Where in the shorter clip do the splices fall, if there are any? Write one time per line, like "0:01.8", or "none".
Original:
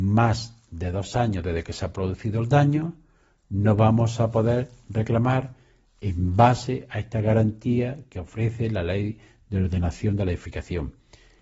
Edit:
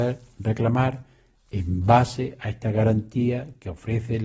none